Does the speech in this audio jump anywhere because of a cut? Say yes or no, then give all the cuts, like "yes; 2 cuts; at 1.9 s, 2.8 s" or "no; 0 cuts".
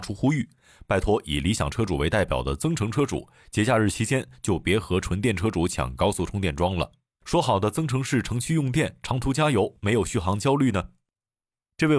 no; 0 cuts